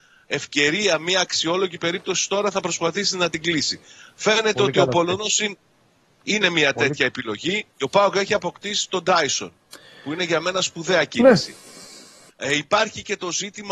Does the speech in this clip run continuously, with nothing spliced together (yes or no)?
no